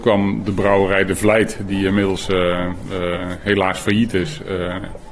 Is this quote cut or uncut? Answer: uncut